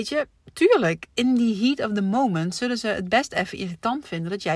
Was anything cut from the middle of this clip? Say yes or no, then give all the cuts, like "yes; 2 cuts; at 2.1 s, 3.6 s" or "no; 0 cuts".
no; 0 cuts